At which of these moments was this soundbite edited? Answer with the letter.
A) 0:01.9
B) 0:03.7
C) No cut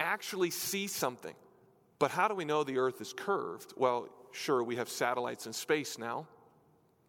A